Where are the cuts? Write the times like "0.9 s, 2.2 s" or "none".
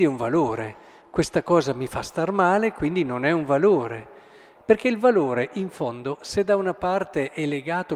4.6 s